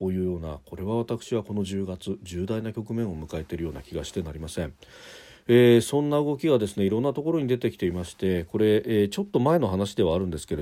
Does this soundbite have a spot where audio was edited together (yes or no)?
no